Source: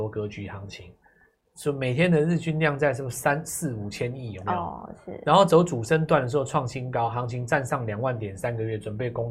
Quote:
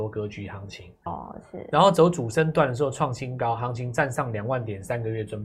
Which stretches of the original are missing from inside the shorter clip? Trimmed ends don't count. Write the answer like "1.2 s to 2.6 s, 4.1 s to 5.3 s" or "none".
1.1 s to 4.6 s